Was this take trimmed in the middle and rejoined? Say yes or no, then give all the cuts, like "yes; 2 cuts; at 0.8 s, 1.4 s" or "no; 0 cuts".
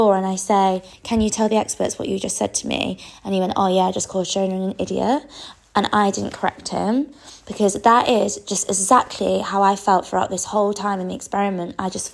no; 0 cuts